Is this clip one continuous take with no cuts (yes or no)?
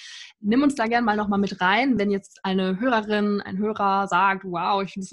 yes